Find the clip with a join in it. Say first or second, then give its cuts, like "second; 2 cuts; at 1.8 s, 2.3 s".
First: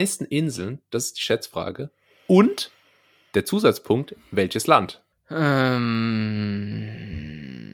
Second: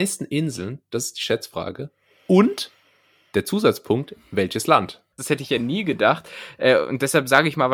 second; 1 cut; at 5.2 s